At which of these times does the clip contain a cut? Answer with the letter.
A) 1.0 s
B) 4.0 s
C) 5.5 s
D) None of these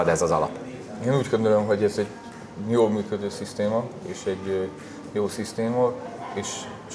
D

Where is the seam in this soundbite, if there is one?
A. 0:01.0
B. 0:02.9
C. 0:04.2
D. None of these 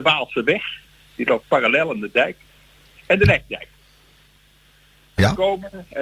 D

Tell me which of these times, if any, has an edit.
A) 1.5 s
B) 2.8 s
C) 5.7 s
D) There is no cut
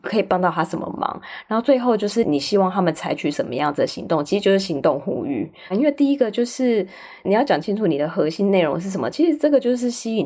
C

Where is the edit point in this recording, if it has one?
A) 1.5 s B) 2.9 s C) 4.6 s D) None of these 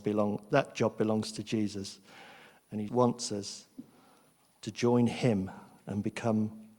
B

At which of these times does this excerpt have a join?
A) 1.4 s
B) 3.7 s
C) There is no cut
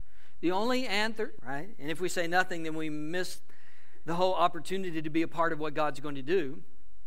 A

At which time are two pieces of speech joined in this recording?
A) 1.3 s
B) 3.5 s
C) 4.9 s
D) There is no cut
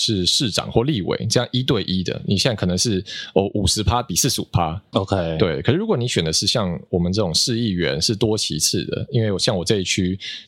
C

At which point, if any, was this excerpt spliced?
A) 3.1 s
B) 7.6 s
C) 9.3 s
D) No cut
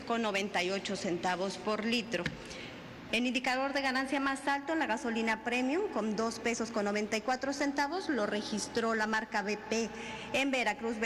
A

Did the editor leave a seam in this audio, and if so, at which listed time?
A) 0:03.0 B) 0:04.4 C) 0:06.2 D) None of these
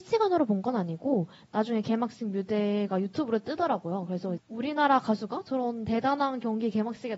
B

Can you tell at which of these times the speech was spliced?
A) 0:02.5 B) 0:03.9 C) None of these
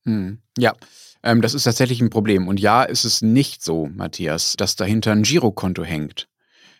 C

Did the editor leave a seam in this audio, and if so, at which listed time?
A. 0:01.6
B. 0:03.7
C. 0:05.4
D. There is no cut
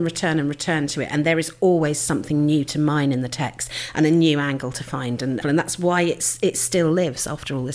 C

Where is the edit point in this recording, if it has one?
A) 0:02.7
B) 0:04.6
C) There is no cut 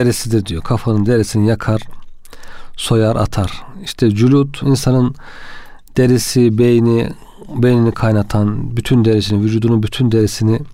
B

